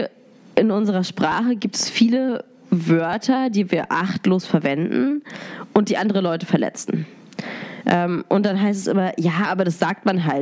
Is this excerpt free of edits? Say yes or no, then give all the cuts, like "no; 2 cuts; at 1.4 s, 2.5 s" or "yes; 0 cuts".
yes; 0 cuts